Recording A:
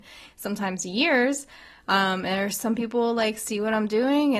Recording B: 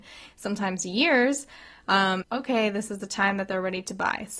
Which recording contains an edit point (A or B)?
B